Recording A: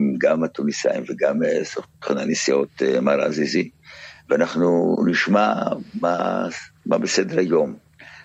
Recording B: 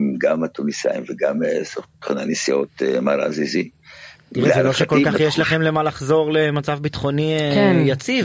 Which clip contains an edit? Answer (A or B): B